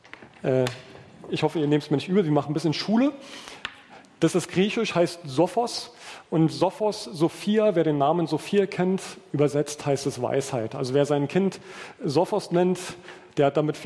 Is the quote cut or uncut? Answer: uncut